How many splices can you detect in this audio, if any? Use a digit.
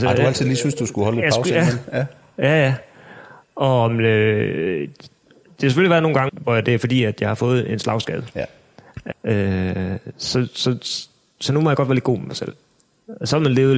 2